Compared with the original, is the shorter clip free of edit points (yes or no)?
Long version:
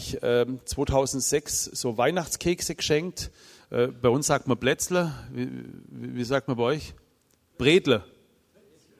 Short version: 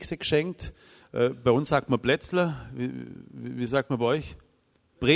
yes